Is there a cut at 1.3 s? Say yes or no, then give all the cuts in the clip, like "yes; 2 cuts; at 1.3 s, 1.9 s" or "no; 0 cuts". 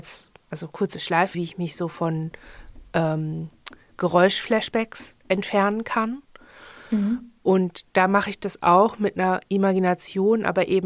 yes; 1 cut; at 1.3 s